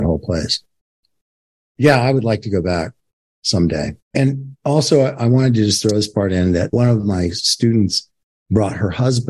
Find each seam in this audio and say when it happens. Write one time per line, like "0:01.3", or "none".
0:04.0